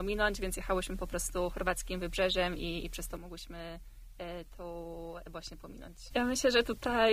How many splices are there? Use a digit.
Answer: 1